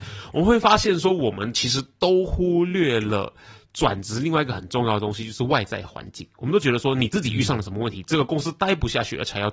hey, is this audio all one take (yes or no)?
yes